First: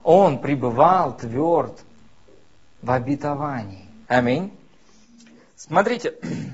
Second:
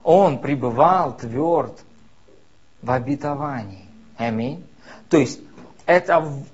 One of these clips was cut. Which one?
first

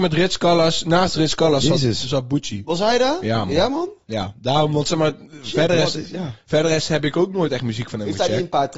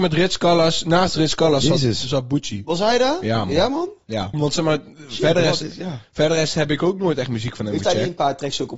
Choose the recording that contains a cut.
second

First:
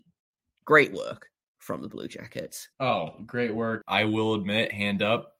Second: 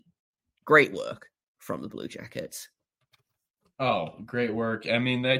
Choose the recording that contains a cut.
first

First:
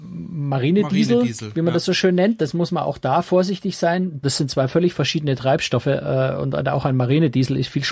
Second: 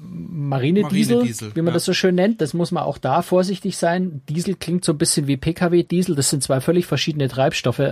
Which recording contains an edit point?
first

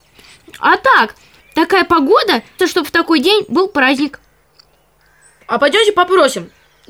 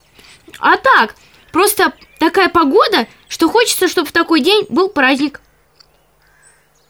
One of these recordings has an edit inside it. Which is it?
first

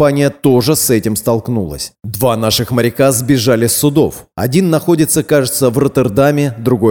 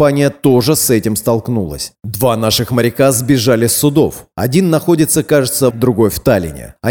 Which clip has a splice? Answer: second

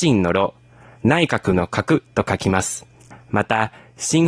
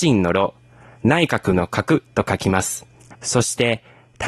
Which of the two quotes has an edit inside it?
second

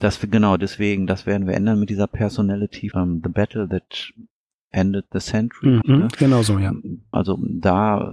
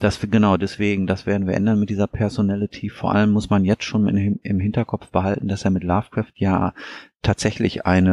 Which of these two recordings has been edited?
first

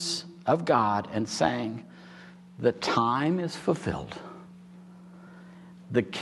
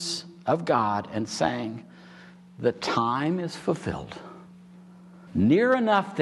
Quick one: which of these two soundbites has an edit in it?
second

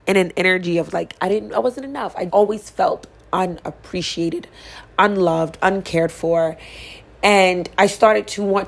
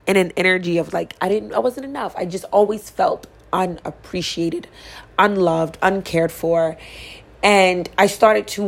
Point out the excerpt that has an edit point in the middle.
first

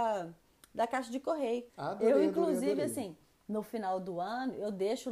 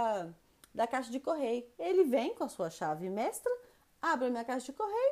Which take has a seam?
first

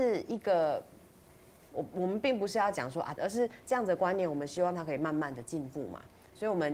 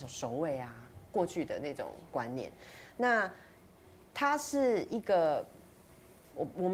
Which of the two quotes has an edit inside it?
first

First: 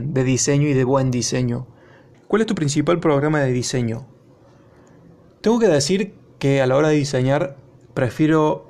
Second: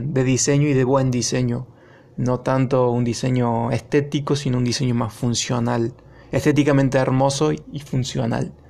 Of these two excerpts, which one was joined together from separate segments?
first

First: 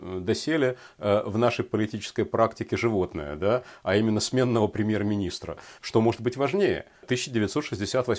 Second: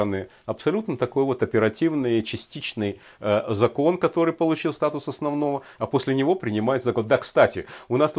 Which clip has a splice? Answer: first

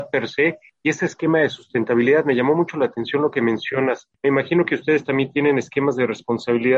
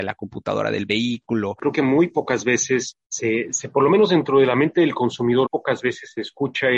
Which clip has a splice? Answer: second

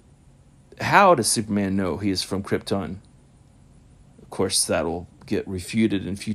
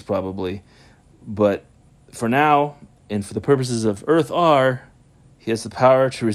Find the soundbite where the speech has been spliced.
first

